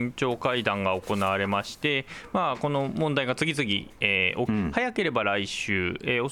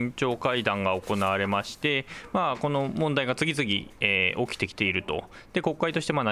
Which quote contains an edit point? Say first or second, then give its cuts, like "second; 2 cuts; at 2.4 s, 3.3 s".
first; 1 cut; at 4.5 s